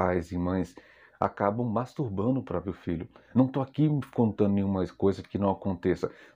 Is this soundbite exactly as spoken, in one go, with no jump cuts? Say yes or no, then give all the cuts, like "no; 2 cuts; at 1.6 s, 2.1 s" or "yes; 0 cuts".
yes; 0 cuts